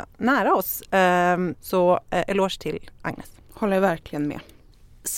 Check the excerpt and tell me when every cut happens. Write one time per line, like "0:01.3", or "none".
0:01.5